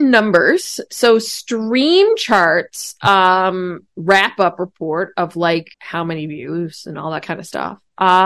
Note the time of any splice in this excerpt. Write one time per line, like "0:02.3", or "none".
0:03.9
0:05.7